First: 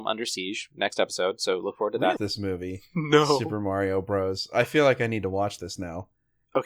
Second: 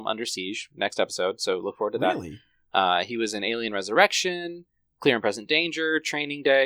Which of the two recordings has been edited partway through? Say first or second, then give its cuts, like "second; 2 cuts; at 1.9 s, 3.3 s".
first; 1 cut; at 2.2 s